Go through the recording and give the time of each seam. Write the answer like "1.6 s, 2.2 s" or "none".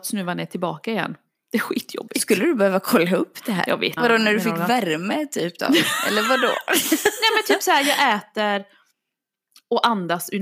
4.0 s